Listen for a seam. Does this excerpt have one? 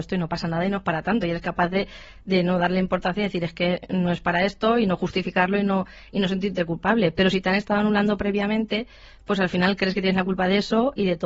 no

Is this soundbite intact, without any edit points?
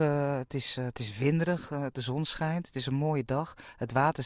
yes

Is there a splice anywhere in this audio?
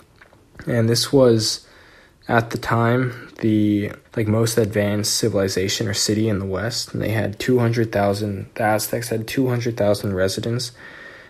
yes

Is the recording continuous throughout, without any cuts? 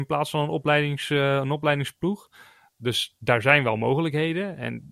yes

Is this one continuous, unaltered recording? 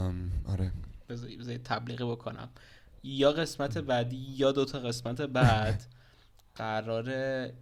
yes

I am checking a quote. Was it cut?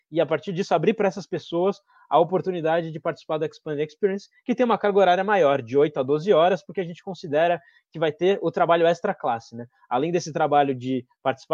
no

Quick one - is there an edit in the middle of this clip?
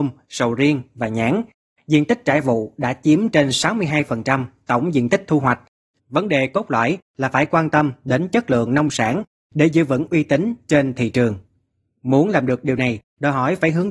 yes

